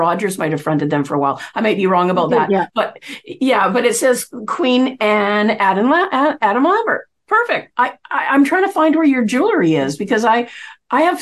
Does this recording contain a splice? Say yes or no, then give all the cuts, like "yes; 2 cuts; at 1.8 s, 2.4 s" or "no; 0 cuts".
yes; 1 cut; at 7.7 s